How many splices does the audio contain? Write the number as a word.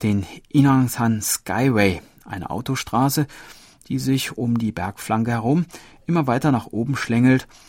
zero